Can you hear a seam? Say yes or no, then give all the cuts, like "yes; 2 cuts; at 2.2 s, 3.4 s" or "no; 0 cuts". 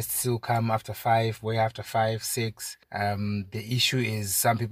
yes; 1 cut; at 2.8 s